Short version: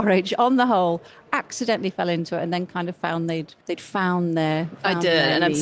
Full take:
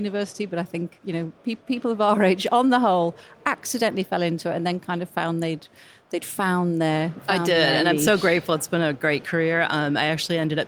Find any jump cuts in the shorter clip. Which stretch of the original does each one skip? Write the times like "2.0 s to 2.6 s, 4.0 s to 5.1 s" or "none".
5.7 s to 6.0 s